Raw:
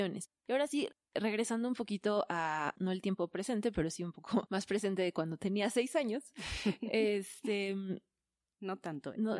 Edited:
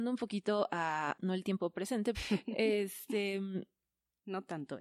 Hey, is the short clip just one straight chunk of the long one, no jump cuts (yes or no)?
no